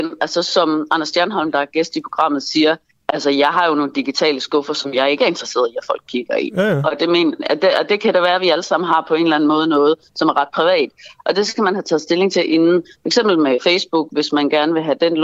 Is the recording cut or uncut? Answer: uncut